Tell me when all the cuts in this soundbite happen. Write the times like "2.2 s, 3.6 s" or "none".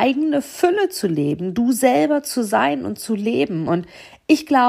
none